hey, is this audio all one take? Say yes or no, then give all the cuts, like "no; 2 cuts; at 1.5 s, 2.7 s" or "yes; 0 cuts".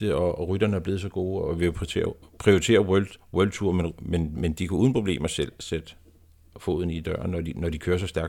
yes; 0 cuts